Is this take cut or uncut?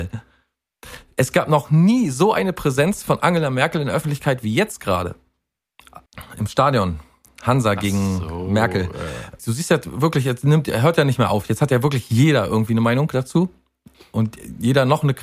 cut